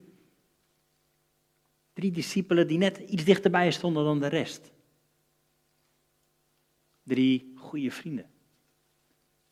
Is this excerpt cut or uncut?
uncut